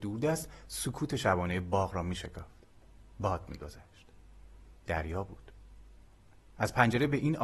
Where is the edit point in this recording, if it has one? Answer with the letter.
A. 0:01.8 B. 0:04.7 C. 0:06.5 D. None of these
B